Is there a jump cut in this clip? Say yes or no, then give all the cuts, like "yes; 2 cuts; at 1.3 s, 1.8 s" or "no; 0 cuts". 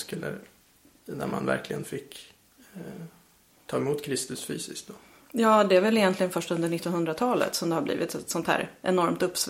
no; 0 cuts